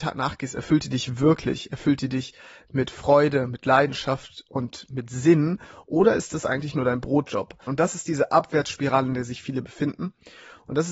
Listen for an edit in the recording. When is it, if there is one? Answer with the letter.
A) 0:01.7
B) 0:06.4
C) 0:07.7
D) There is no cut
C